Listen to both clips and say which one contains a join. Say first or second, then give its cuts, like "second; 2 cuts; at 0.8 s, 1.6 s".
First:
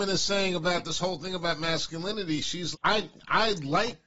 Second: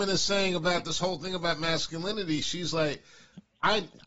first; 1 cut; at 2.7 s